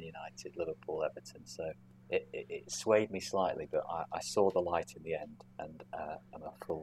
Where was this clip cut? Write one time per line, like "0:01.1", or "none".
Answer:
none